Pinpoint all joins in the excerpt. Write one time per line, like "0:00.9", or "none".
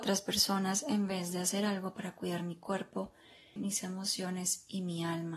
0:03.6